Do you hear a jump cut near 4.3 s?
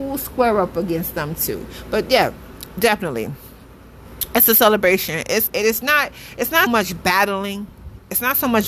no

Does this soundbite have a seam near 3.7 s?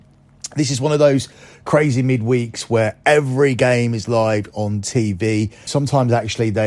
no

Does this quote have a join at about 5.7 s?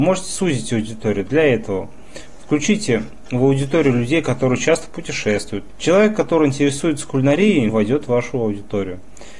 yes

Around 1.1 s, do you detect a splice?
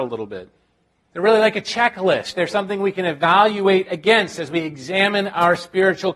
yes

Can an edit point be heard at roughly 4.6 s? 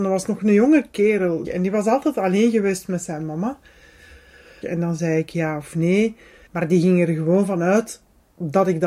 yes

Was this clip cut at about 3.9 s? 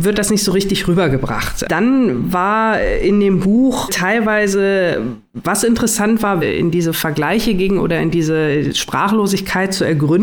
yes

